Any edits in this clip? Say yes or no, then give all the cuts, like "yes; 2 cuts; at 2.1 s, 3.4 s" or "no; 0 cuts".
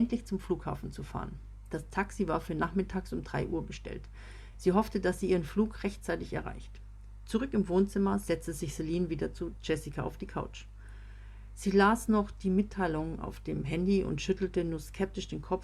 no; 0 cuts